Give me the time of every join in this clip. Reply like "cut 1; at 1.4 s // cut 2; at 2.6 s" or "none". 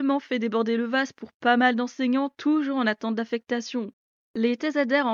none